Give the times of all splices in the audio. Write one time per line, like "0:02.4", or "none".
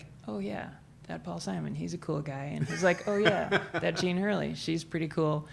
none